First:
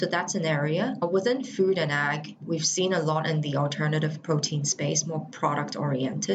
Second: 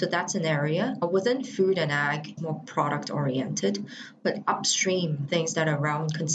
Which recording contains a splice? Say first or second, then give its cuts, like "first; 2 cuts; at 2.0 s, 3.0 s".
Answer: second; 1 cut; at 2.4 s